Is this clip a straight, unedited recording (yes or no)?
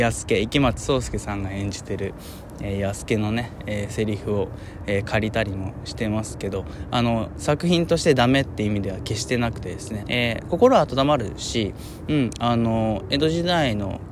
no